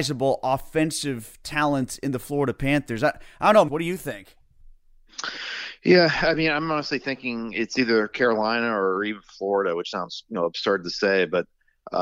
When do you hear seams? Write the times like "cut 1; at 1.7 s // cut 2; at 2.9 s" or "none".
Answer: cut 1; at 3.7 s